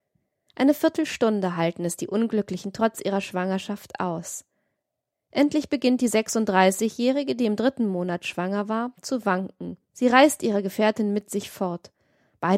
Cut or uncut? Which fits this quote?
uncut